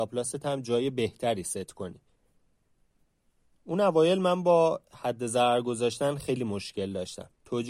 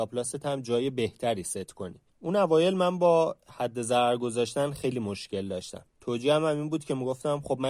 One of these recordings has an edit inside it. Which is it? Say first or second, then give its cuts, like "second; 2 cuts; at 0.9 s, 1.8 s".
second; 1 cut; at 2.1 s